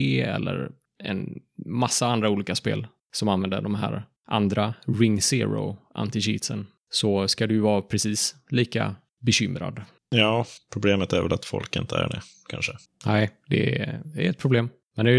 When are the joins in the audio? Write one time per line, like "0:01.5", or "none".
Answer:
none